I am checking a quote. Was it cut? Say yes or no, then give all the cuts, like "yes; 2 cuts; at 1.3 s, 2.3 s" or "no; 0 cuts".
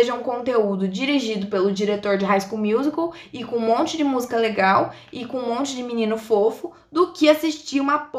no; 0 cuts